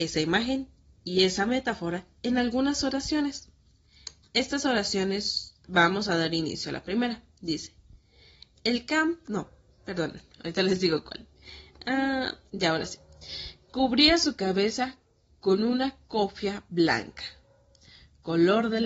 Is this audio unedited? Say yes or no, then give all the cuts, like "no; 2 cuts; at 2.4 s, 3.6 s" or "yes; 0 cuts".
yes; 0 cuts